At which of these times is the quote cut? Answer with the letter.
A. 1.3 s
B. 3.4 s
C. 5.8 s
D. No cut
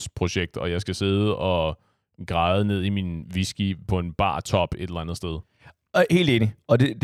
D